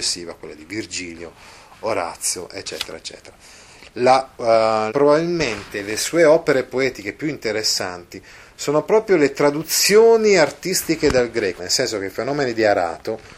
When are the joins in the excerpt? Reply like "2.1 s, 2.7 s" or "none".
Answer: 4.9 s, 11.6 s